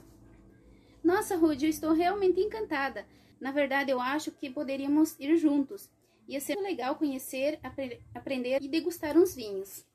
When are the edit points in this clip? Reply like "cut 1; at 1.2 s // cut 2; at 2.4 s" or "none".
cut 1; at 3.3 s // cut 2; at 6.5 s // cut 3; at 8.6 s